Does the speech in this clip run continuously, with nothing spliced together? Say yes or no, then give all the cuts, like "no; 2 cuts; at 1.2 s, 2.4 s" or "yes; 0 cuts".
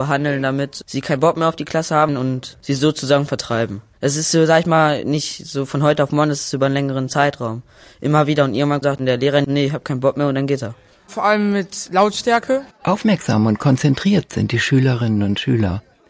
no; 1 cut; at 12.7 s